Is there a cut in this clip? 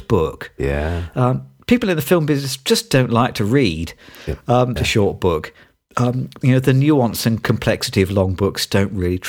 yes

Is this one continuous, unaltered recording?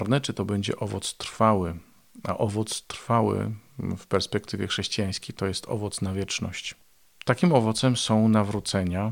yes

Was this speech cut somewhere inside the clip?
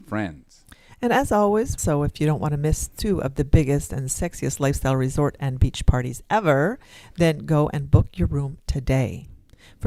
yes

